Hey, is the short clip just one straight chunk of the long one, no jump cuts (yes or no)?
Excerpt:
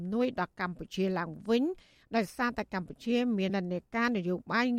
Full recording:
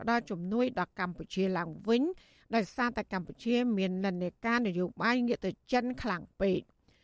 no